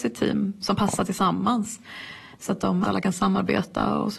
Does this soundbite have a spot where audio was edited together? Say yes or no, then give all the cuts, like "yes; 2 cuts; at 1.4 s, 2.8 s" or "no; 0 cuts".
yes; 1 cut; at 2.8 s